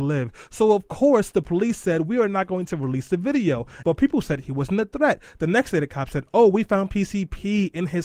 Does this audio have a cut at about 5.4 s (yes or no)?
no